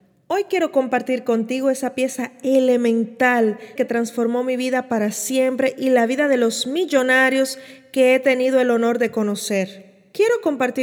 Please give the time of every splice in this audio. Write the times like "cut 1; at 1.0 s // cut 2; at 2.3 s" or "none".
cut 1; at 3.8 s